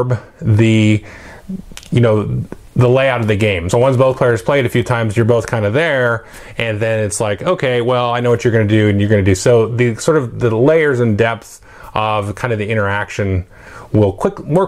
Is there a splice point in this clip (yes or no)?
no